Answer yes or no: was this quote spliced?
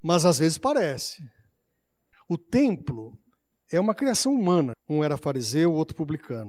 yes